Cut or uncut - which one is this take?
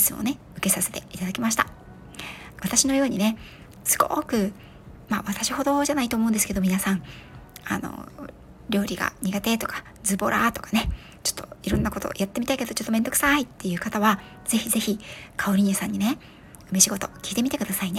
cut